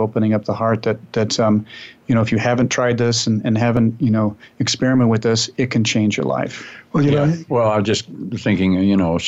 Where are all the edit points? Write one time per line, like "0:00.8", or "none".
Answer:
0:07.5